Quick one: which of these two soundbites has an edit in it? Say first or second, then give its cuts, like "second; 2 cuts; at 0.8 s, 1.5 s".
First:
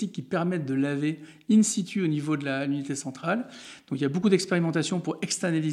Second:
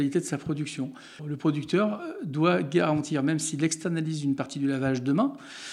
second; 1 cut; at 1.2 s